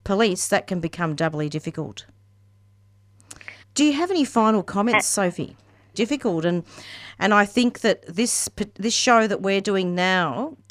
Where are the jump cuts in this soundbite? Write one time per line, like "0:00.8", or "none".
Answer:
0:03.6
0:05.9